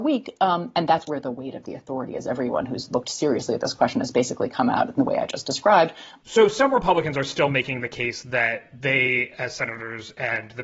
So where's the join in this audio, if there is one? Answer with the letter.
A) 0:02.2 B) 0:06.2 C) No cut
B